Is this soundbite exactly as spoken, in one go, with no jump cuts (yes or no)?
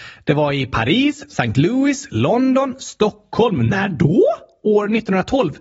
yes